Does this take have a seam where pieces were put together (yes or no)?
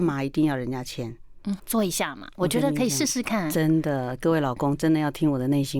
yes